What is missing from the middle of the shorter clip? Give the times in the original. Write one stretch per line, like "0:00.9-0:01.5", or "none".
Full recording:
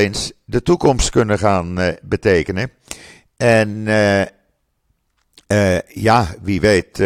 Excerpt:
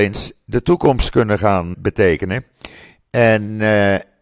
0:01.7-0:02.0